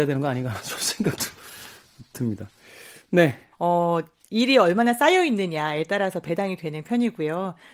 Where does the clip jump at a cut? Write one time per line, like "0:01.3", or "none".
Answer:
0:03.5